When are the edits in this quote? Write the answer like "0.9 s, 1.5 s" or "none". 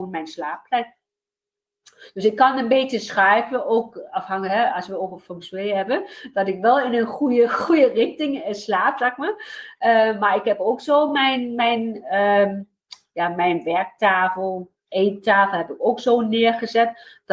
none